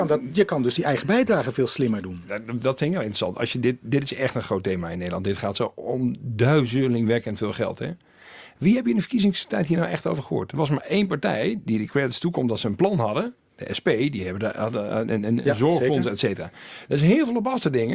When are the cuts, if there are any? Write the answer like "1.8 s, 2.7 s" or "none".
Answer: none